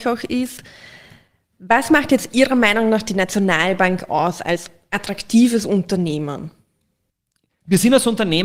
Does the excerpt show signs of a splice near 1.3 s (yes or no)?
no